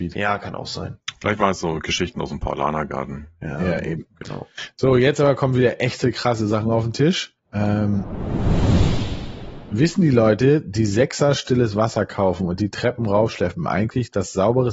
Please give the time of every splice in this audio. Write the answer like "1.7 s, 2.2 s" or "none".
none